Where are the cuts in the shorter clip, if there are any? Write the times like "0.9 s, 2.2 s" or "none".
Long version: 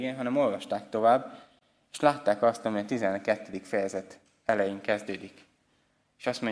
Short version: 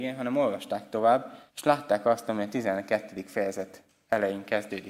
1.5 s

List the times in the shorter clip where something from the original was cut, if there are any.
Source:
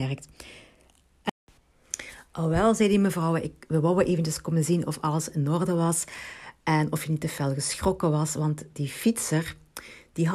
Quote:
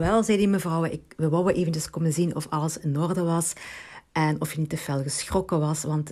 none

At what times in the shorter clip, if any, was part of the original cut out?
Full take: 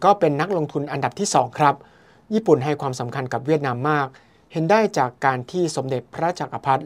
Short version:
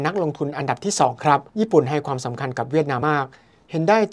1.5 s, 3.0 s

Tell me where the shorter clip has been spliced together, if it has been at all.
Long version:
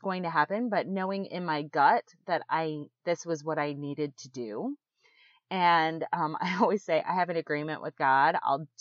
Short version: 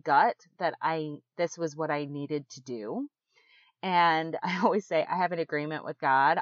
4.4 s

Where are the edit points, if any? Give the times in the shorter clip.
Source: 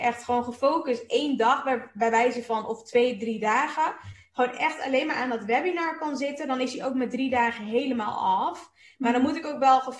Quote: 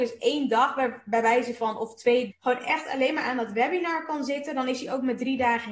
2.3 s

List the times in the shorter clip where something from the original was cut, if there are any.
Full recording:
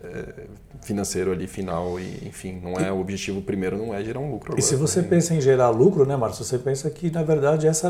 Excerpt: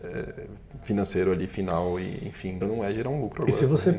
2.6 s

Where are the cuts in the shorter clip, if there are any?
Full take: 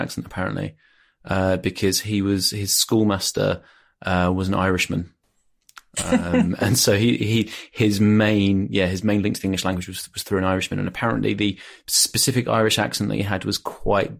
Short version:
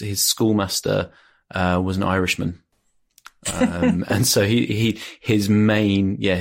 none

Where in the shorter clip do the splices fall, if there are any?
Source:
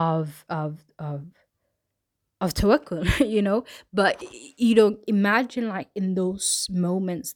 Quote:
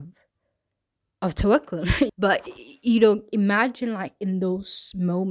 2.1 s

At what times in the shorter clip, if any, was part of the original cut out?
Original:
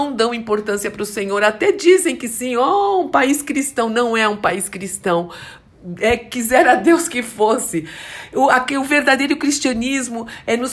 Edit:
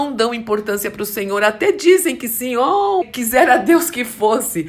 3.0 s

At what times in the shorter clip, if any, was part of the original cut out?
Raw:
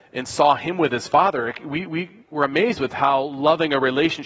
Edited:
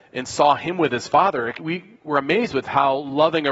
1.6 s

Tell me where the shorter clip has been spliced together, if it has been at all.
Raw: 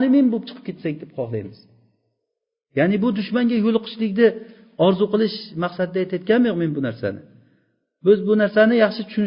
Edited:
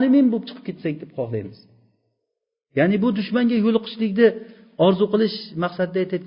none

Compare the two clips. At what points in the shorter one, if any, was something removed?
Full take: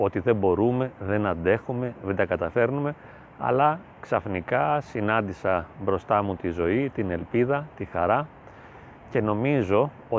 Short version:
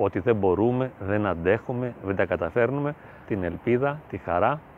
3.2 s

